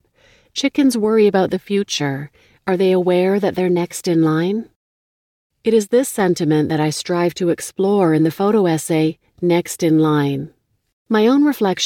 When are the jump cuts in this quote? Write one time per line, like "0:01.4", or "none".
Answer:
0:02.5